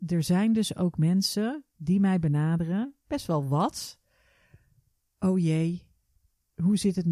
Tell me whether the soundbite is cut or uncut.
uncut